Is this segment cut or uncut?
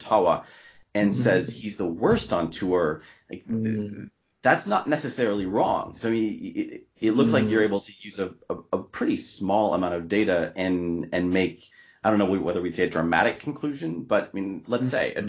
uncut